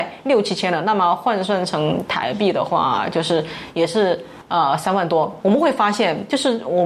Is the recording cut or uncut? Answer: uncut